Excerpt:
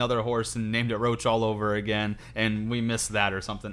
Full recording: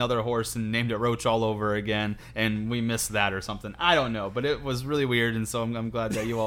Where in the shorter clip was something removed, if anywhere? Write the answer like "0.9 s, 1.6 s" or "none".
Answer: none